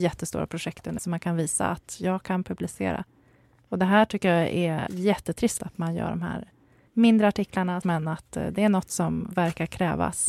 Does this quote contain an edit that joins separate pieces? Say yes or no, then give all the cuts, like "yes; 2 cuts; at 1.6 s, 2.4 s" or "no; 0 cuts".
yes; 3 cuts; at 1.0 s, 5.6 s, 7.8 s